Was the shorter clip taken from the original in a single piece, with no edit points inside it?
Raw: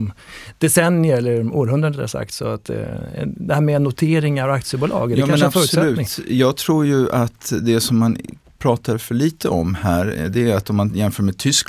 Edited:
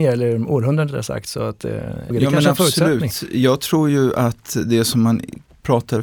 no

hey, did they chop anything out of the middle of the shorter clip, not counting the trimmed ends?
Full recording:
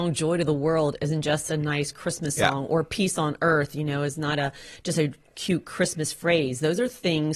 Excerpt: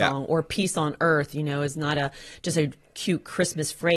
no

